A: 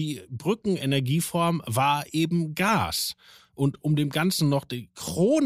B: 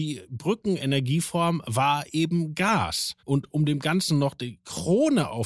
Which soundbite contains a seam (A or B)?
B